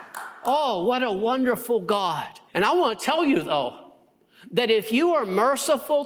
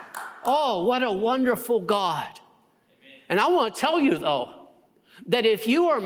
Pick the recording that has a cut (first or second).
first